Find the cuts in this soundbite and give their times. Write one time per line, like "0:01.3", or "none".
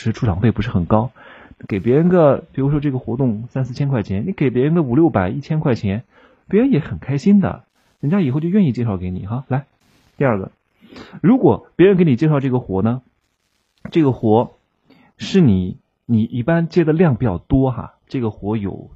none